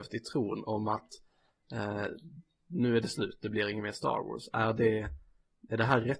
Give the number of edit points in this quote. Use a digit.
0